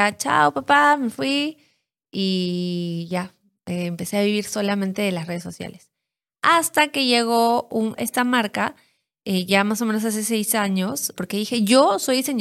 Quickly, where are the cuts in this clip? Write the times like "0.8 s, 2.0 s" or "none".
8.0 s, 11.2 s